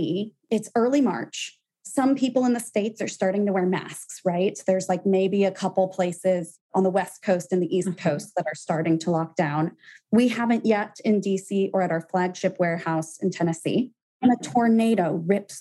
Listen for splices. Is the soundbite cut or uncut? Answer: uncut